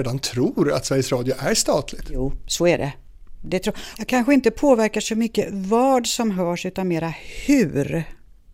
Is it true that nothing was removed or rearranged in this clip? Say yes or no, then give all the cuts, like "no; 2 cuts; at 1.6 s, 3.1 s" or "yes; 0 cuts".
no; 1 cut; at 3.9 s